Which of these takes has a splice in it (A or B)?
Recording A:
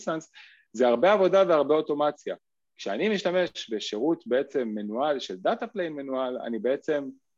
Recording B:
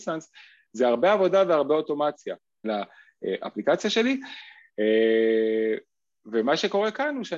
B